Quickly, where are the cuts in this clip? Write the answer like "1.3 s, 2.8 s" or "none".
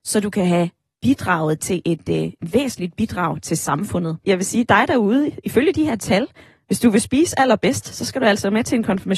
4.2 s